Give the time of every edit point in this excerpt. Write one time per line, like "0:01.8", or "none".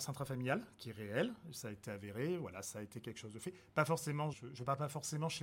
0:04.3